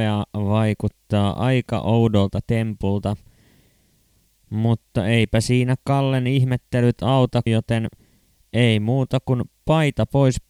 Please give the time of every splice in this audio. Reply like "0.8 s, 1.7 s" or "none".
7.5 s